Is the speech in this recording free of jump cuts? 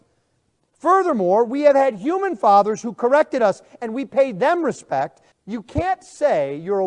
no; 1 cut; at 5.3 s

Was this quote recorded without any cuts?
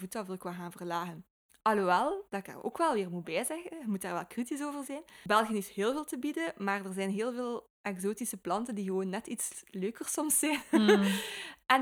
yes; 0 cuts

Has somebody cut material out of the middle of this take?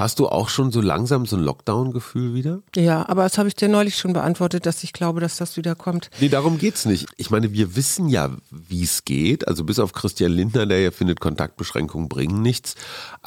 no; 0 cuts

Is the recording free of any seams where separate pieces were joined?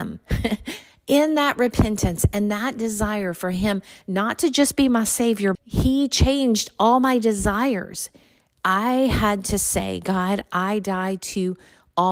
no; 2 cuts; at 5.5 s, 8.5 s

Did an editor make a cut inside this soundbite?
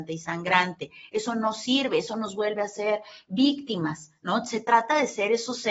no; 0 cuts

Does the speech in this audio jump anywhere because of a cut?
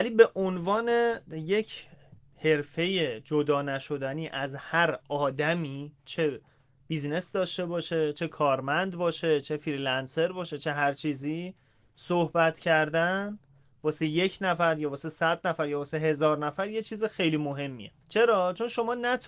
yes; 1 cut; at 18.0 s

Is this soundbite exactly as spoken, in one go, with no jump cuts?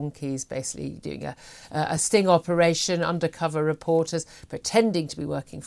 yes; 0 cuts

